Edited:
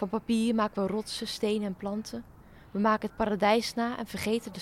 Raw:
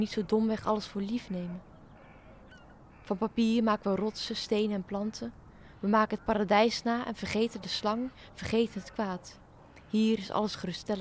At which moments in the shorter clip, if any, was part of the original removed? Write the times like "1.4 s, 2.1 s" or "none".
none